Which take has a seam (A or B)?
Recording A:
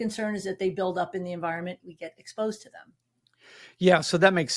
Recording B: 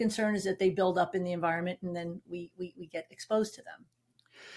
A